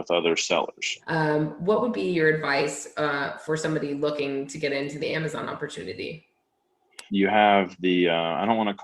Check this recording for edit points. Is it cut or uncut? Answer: cut